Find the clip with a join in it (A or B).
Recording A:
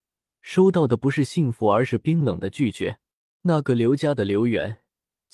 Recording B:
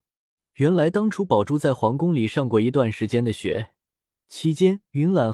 A